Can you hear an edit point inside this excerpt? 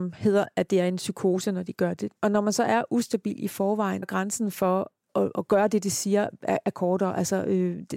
yes; 2 cuts; at 2.2 s, 4.0 s

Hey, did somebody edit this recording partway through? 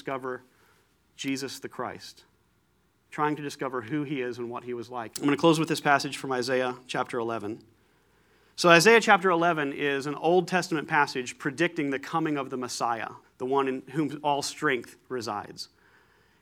yes; 2 cuts; at 5.1 s, 13.2 s

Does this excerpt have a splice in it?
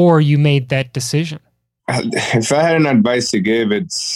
no; 0 cuts

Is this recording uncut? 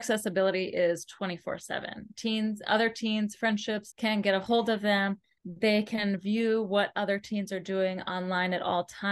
yes; 0 cuts

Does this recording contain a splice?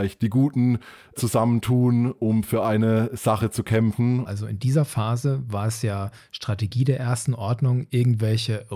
yes; 1 cut; at 4.3 s

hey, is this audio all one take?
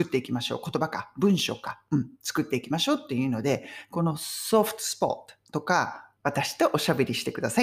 no; 1 cut; at 6.2 s

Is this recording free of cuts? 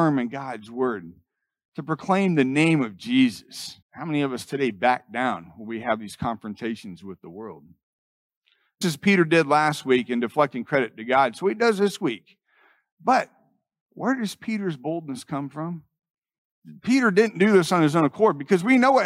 no; 2 cuts; at 3.8 s, 8.8 s

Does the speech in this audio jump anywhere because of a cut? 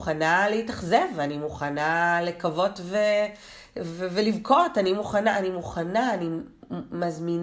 no; 0 cuts

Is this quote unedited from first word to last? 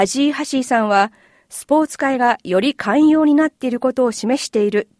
yes; 0 cuts

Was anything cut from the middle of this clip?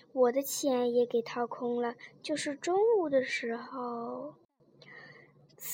no; 0 cuts

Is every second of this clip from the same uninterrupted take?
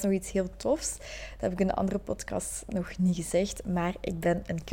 yes; 0 cuts

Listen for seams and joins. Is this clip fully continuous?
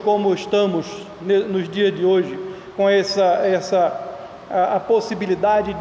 yes; 0 cuts

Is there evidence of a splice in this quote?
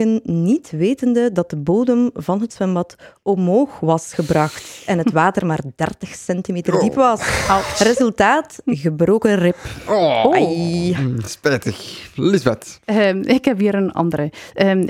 no; 0 cuts

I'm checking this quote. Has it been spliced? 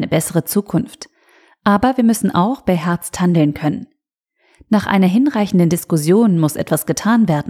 no; 0 cuts

